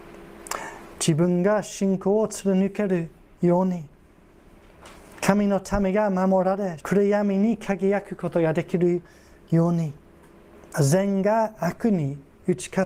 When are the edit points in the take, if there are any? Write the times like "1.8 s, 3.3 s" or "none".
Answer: 6.8 s, 10.7 s